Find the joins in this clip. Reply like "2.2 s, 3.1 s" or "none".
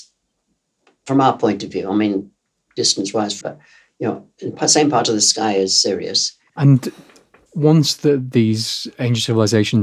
3.4 s, 6.5 s